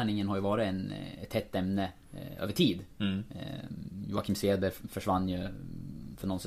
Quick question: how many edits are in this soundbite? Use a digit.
0